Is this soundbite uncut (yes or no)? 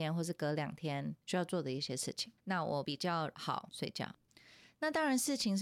yes